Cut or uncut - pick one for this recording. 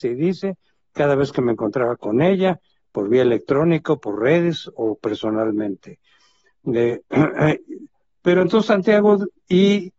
cut